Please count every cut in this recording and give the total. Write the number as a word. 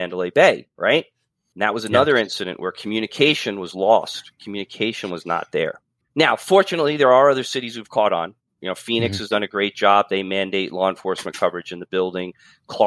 one